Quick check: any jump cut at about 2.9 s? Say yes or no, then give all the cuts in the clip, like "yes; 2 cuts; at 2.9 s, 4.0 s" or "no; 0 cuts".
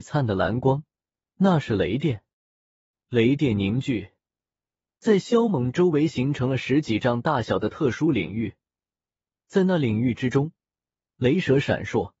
no; 0 cuts